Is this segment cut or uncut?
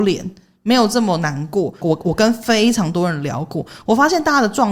cut